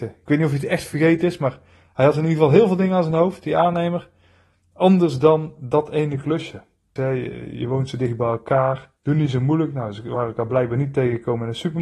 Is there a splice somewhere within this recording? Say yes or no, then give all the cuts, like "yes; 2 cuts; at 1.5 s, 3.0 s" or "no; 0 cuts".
yes; 2 cuts; at 7.0 s, 9.0 s